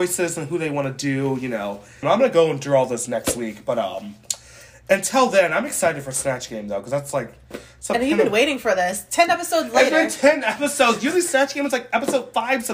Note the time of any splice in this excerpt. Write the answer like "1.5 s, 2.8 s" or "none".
2.0 s